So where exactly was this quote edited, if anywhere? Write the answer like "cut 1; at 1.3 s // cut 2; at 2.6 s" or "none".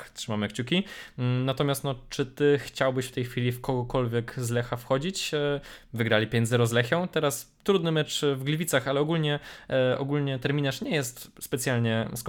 none